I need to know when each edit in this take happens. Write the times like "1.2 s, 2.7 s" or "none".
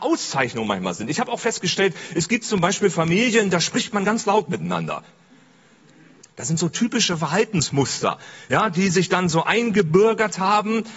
6.2 s